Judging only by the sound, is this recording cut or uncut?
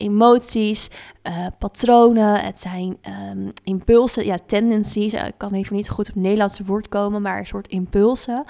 uncut